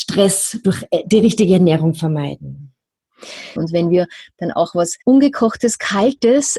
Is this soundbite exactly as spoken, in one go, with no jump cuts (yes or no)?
no